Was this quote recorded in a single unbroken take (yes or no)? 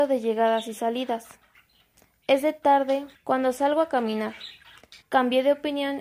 no